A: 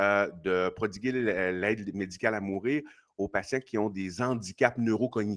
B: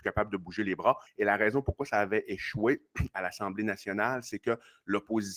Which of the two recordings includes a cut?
B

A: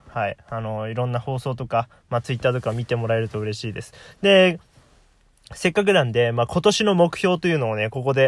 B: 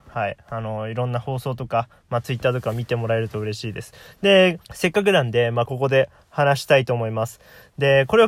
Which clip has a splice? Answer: B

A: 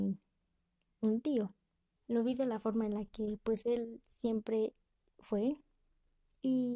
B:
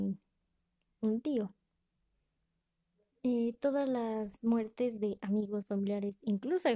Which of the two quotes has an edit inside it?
A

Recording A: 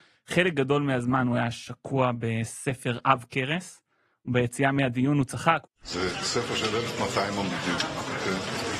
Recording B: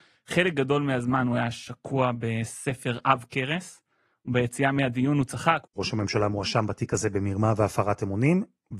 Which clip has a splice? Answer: B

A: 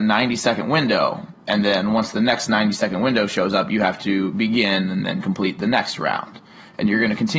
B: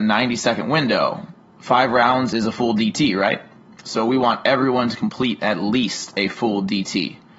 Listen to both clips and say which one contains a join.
B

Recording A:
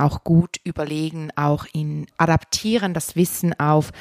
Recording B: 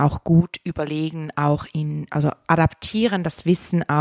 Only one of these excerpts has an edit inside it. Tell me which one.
A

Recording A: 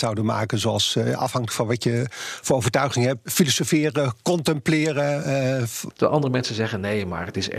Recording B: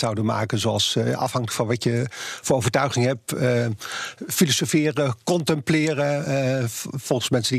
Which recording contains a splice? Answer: A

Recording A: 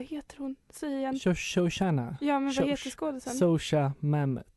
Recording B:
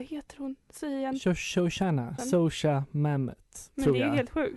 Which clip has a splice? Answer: B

